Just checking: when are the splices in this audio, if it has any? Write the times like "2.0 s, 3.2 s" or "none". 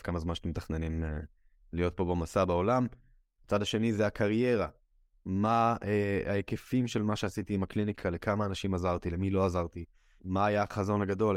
3.4 s, 10.2 s